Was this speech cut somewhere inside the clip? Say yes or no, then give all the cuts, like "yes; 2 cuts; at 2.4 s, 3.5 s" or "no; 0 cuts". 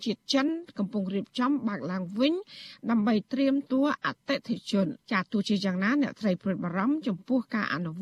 yes; 2 cuts; at 3.6 s, 5.0 s